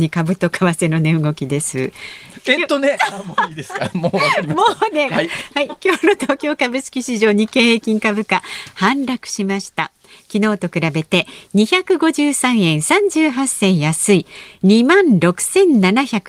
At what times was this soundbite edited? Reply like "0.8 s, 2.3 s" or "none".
5.1 s